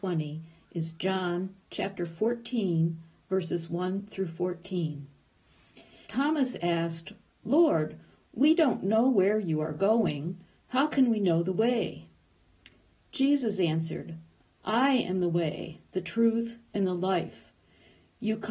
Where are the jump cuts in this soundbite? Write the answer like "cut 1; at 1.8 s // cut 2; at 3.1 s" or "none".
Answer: cut 1; at 6.0 s